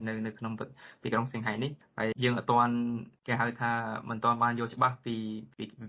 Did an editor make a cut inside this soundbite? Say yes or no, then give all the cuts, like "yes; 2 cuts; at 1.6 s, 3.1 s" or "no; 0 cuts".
yes; 1 cut; at 2.1 s